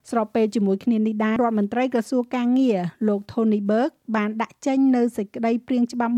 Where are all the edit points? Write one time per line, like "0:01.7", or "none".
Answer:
0:01.4